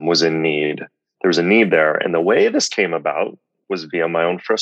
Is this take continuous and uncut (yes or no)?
yes